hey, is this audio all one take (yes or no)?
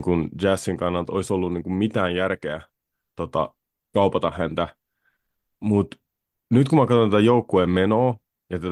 yes